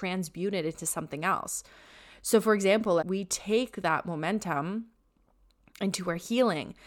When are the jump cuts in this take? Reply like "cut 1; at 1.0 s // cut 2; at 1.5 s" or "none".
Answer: cut 1; at 3.0 s